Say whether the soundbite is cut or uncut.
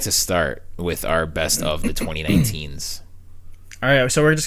uncut